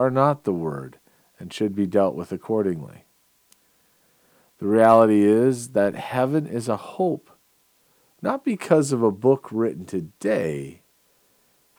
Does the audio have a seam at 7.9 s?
no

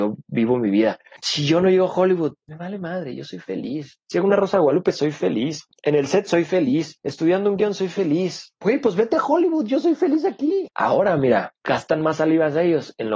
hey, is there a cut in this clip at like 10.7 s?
yes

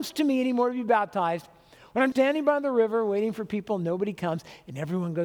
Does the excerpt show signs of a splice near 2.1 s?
yes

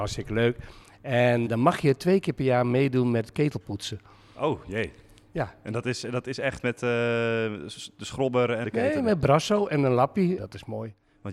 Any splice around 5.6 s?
no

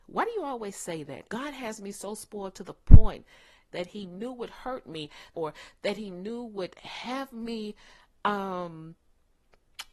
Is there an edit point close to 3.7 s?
yes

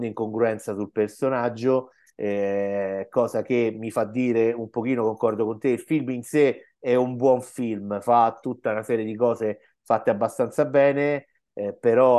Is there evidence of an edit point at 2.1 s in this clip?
no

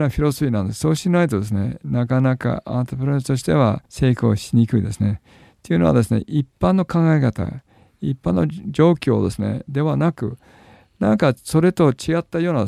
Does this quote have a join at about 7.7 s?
no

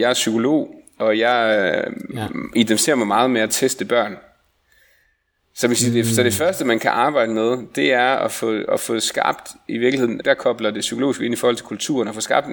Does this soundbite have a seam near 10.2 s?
yes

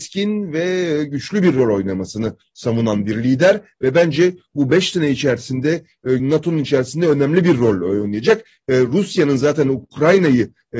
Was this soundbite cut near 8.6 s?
no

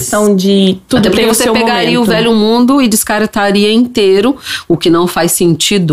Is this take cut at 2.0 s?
no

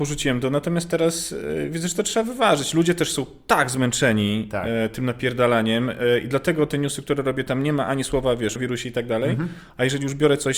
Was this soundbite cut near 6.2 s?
no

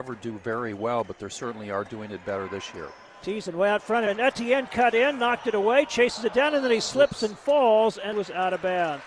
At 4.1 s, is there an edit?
yes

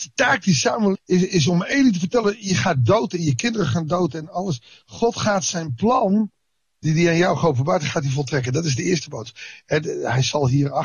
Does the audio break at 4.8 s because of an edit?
no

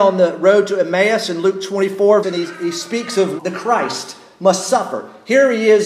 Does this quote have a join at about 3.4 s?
yes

